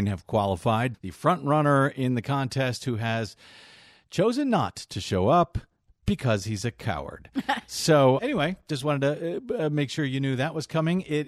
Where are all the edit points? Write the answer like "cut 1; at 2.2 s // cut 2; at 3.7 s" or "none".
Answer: cut 1; at 0.9 s // cut 2; at 8.2 s

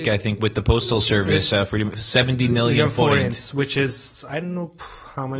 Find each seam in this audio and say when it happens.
none

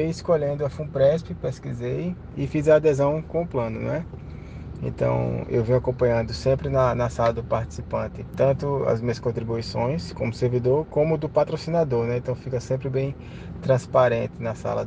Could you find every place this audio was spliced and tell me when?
none

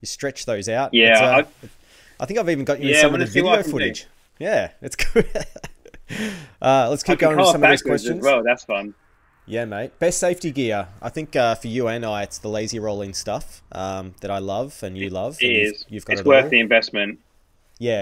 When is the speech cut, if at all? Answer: none

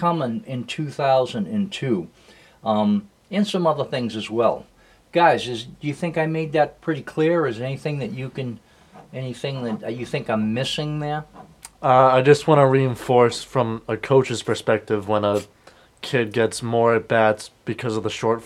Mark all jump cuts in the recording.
none

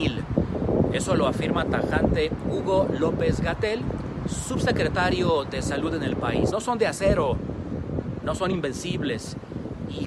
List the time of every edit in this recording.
cut 1; at 6.5 s

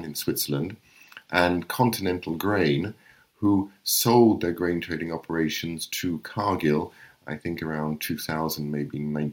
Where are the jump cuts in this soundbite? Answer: none

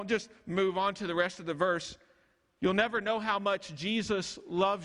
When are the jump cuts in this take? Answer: none

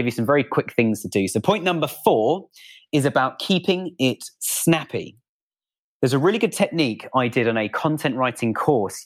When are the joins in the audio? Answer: none

